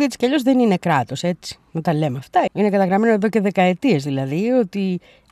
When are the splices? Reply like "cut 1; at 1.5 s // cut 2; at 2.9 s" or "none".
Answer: cut 1; at 2.5 s